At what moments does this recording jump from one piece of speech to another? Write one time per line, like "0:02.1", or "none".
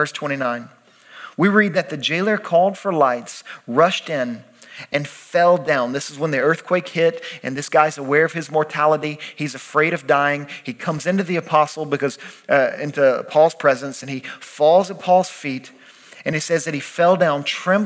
none